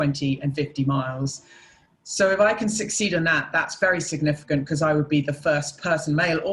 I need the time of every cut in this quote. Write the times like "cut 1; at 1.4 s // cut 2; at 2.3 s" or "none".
none